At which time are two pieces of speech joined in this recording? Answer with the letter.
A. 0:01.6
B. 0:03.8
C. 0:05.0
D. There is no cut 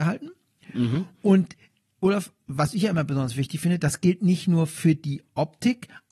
D